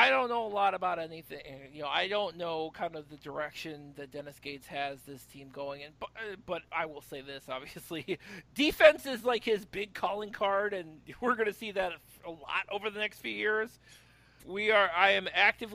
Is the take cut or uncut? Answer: cut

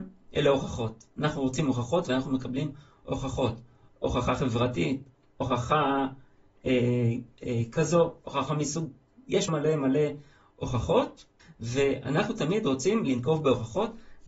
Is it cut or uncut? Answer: cut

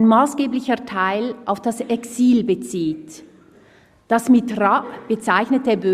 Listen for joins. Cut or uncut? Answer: uncut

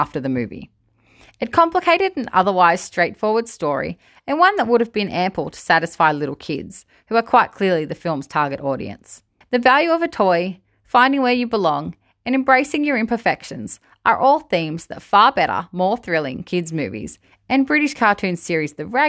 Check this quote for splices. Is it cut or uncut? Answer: cut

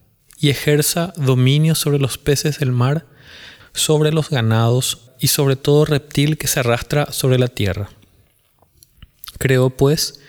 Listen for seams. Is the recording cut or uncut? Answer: cut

